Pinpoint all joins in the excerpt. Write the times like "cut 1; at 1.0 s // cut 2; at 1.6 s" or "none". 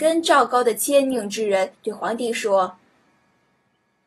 cut 1; at 1.8 s // cut 2; at 3.1 s